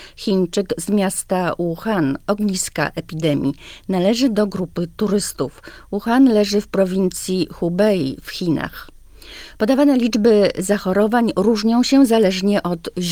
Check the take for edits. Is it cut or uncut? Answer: uncut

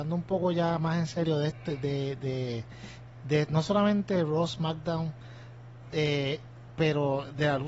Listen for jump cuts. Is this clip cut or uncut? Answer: uncut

